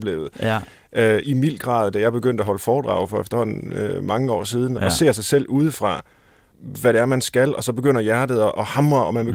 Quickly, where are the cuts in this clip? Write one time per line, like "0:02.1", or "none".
0:01.2
0:04.8
0:06.5